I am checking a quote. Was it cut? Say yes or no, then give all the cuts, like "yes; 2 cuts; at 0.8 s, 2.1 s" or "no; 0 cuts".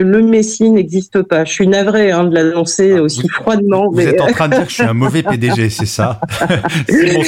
no; 0 cuts